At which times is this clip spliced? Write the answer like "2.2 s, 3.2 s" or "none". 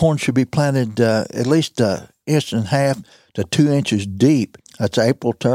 4.6 s